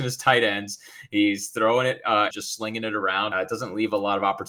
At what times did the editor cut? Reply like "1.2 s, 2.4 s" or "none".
2.3 s, 3.3 s

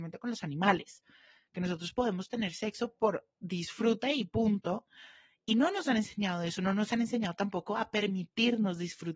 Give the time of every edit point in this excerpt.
none

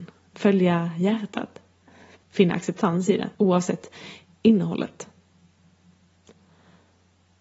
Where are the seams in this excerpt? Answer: 2.2 s, 3.3 s

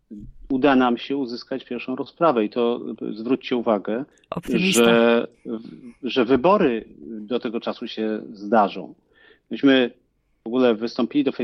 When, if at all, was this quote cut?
none

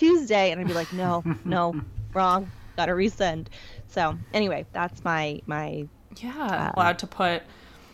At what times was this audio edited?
6.8 s

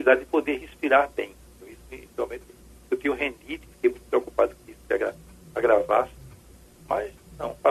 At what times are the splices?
none

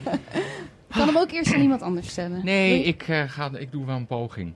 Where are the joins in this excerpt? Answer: none

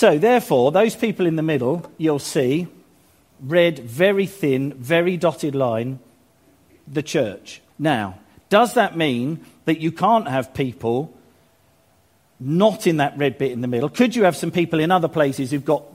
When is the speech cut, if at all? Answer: 7.7 s

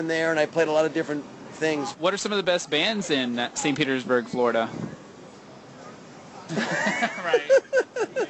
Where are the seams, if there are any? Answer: 1.9 s, 6.5 s

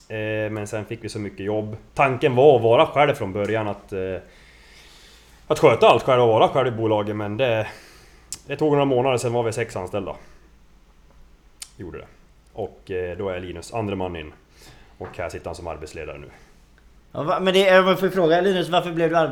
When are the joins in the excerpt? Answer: none

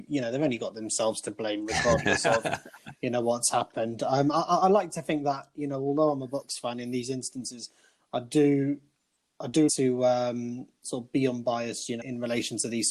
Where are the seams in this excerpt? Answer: 9.7 s, 12.0 s

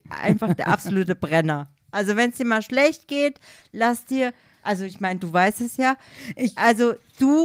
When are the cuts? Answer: none

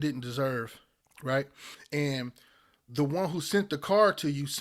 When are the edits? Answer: 1.0 s

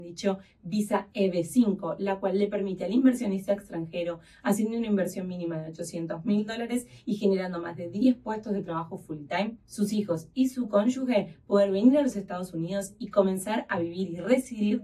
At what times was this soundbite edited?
9.6 s

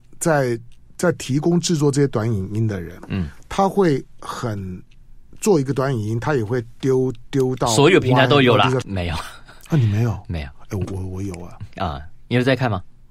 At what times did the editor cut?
8.8 s, 10.9 s

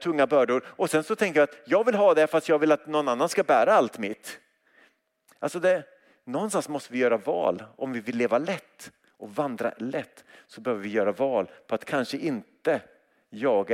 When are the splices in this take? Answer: none

